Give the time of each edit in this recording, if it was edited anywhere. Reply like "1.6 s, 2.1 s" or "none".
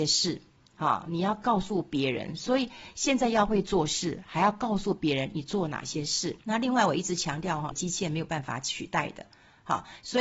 6.4 s, 7.7 s